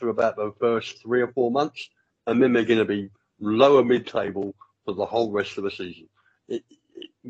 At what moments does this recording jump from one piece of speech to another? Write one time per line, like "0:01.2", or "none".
none